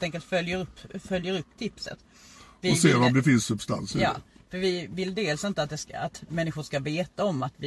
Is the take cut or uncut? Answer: uncut